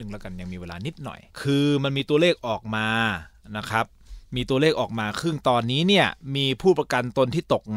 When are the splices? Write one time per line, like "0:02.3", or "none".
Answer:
0:01.3